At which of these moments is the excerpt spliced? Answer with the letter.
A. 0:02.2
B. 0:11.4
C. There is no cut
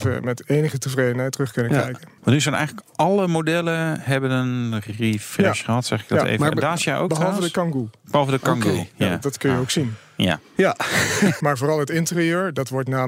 B